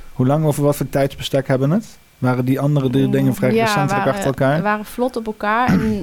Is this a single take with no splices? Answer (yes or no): no